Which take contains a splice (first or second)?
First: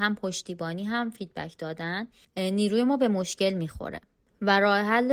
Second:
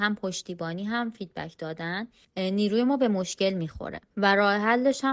second